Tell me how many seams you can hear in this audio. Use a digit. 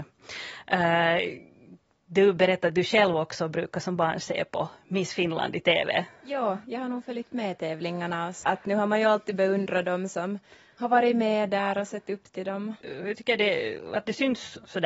2